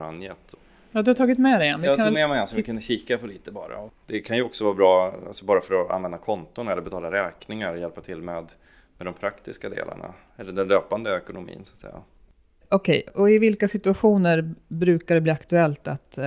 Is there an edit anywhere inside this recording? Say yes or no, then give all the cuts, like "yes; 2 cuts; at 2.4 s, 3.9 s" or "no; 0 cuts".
yes; 1 cut; at 4.0 s